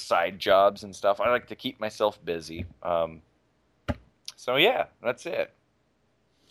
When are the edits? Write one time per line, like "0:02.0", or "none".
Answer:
none

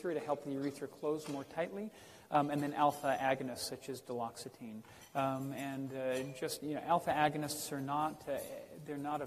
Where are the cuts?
none

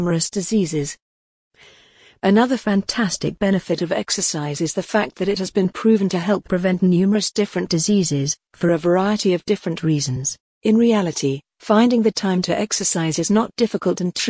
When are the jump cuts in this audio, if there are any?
0:10.5

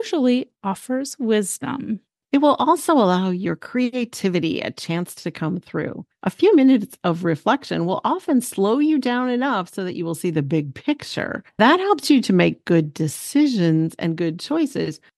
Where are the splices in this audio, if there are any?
none

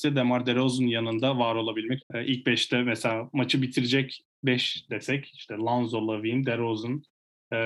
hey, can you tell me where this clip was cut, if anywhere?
0:02.0

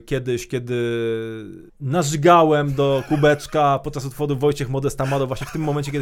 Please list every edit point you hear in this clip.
0:01.7

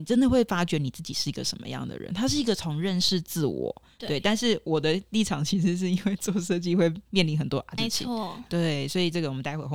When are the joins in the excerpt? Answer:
0:04.0
0:07.8

